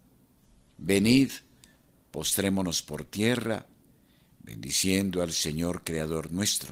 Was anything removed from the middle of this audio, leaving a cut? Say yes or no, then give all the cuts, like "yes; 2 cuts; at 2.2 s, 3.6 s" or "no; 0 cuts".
no; 0 cuts